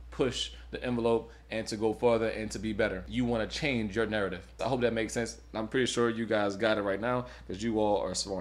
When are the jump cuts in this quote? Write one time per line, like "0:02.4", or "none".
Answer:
0:04.6

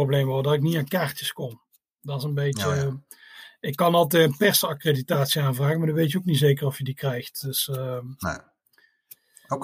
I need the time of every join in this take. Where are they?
none

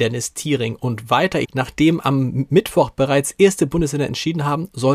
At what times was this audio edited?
0:01.4

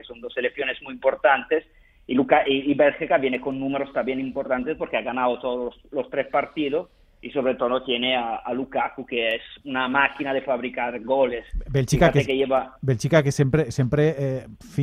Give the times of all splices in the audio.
none

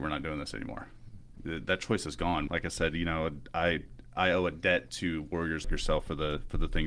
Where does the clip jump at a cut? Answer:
0:02.5
0:05.6

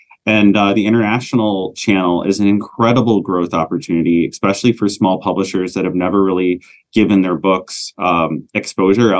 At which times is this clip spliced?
none

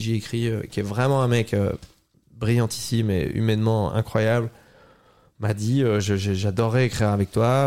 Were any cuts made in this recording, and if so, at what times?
none

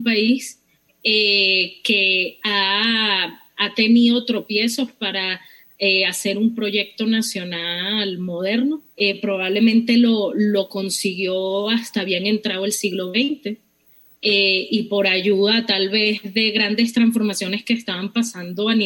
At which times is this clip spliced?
0:08.9

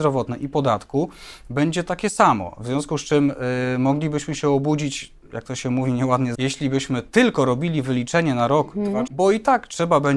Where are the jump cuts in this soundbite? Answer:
0:06.3
0:09.1

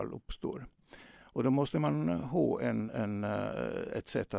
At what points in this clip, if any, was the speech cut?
none

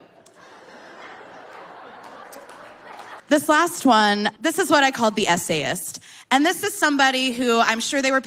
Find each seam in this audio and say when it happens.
0:03.2
0:04.4

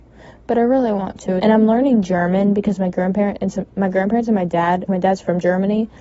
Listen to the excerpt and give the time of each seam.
0:01.4
0:04.9

